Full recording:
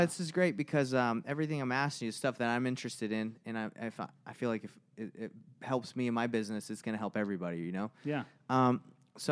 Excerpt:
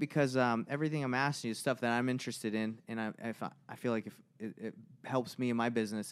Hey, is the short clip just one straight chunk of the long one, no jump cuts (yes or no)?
yes